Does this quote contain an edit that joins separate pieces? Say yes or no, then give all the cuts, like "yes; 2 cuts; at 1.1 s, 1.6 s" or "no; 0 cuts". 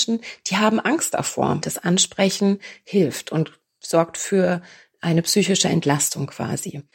yes; 1 cut; at 1.6 s